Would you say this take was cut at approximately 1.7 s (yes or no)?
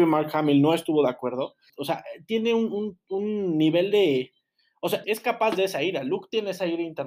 yes